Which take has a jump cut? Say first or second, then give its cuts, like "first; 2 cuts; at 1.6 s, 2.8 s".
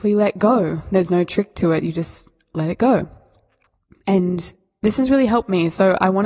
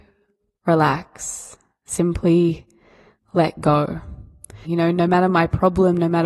second; 1 cut; at 4.6 s